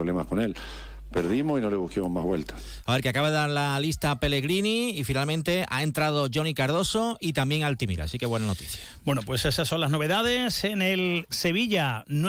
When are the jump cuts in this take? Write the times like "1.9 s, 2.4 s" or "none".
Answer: none